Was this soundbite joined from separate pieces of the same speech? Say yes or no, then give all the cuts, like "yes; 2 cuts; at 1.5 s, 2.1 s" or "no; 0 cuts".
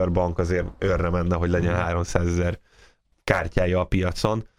no; 0 cuts